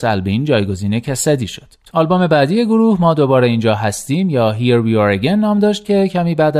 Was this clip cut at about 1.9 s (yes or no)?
yes